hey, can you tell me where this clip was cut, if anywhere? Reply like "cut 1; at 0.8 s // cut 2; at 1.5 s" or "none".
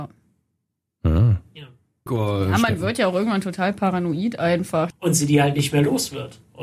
cut 1; at 2.1 s // cut 2; at 4.9 s